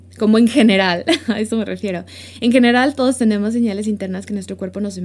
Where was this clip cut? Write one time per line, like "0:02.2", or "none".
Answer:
none